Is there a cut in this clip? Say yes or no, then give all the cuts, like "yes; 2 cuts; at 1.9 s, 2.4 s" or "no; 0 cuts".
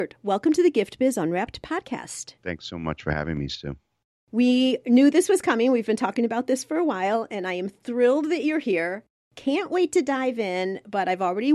yes; 1 cut; at 2.4 s